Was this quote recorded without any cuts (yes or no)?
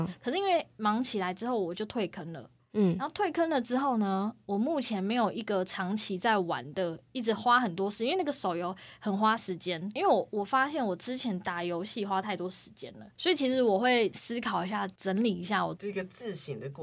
no